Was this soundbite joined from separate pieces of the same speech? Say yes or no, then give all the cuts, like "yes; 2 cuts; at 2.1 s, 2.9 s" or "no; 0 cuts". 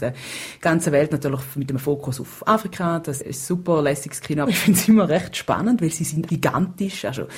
yes; 2 cuts; at 4.5 s, 6.3 s